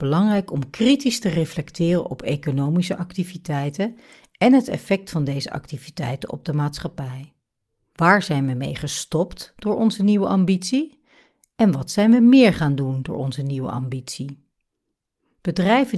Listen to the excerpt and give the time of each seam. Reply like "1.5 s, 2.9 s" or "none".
7.9 s